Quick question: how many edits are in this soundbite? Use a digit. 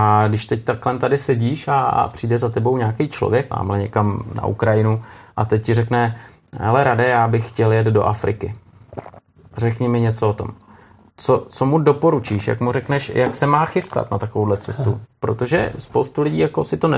1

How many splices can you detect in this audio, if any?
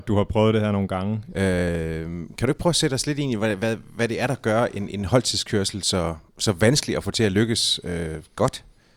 1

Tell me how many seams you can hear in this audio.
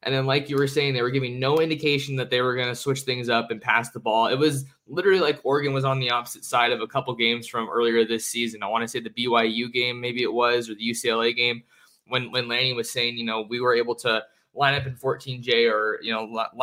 0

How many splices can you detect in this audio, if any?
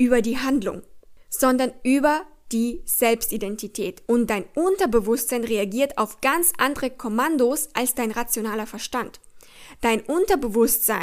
1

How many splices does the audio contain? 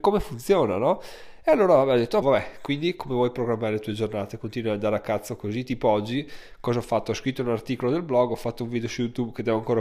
1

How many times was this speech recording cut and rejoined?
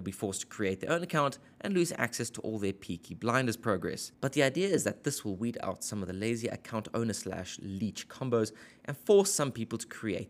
1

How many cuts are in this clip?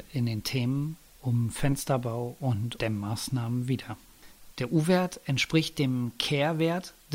2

